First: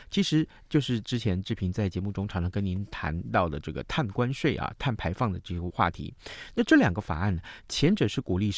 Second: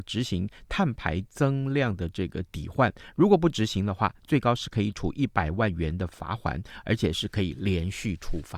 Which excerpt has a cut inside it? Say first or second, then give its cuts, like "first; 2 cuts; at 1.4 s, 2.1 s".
first; 1 cut; at 5.7 s